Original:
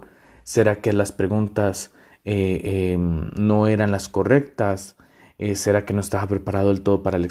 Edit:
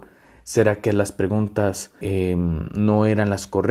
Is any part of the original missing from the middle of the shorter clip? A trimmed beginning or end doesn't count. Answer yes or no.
yes